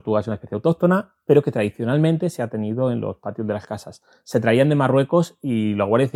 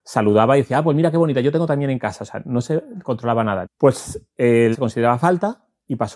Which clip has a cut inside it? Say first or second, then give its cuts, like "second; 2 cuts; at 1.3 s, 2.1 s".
second; 2 cuts; at 3.6 s, 4.7 s